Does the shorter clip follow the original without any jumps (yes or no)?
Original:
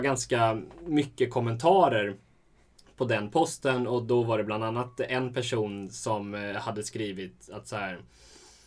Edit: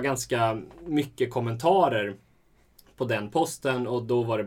yes